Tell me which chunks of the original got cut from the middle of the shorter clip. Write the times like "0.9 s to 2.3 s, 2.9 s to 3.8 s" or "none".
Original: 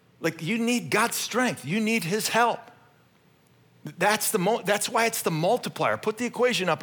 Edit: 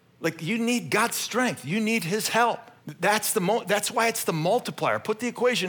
2.8 s to 3.8 s